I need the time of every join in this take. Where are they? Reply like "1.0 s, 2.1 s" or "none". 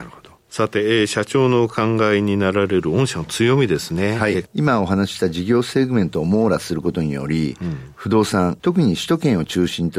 4.5 s, 8.6 s